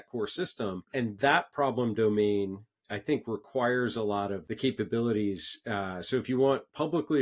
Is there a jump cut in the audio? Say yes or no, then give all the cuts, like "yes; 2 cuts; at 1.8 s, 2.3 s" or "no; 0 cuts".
no; 0 cuts